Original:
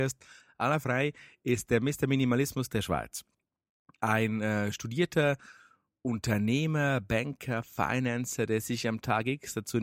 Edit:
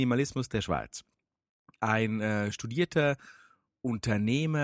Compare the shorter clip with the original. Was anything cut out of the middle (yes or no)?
no